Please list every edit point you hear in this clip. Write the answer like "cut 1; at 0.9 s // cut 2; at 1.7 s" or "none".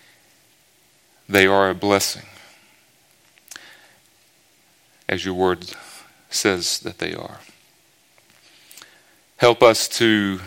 none